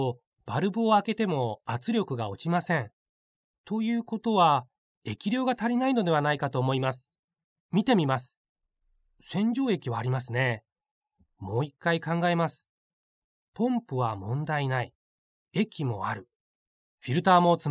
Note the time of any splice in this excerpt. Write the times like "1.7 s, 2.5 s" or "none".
none